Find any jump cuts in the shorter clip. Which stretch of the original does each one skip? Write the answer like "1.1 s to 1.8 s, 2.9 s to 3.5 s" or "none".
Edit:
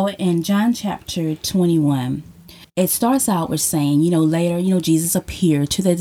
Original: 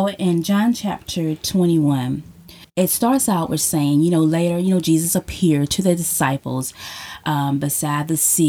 none